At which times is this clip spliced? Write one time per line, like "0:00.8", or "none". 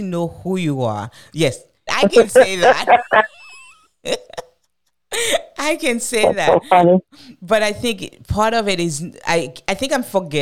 0:01.9